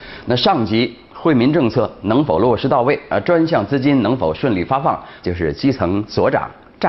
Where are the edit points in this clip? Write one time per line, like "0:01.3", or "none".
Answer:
0:05.2